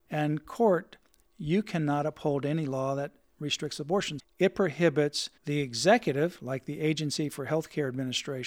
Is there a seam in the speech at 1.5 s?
no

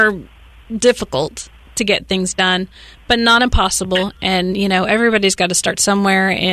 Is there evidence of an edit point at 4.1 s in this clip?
no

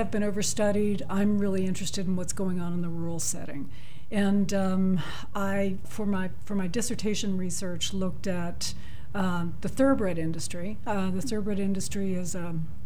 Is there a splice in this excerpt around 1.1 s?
no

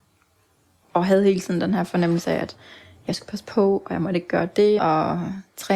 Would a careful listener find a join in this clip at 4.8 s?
yes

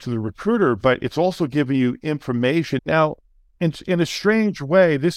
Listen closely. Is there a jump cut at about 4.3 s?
no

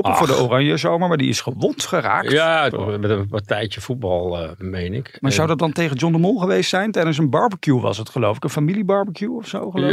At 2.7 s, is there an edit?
yes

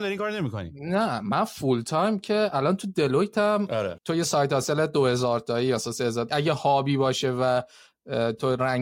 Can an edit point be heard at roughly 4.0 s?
yes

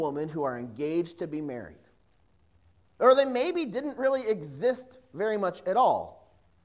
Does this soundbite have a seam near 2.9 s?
yes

